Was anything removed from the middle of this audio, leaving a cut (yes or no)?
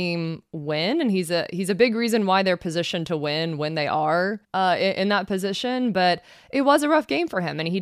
yes